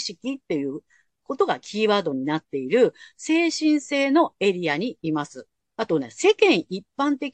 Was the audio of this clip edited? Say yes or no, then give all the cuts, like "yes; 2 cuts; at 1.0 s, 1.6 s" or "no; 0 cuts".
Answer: yes; 1 cut; at 5.7 s